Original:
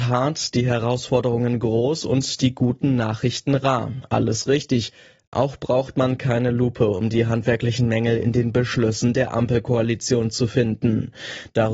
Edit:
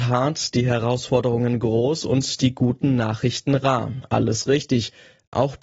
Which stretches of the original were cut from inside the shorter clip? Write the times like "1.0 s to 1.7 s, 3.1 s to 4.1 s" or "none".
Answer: none